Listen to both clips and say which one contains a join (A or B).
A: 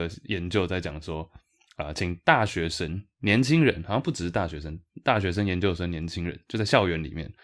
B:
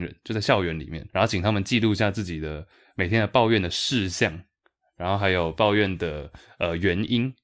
B